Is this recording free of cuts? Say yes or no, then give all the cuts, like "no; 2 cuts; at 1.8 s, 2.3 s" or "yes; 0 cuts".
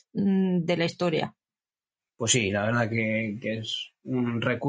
no; 1 cut; at 2.0 s